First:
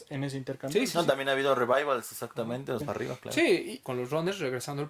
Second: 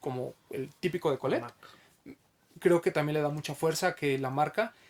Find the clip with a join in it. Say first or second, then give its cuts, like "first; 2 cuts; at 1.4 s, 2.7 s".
first; 2 cuts; at 2.8 s, 3.8 s